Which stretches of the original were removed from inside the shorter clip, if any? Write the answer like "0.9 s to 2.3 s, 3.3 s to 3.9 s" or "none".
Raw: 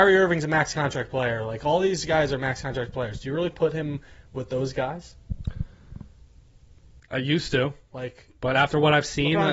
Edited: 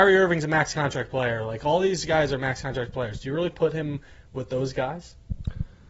none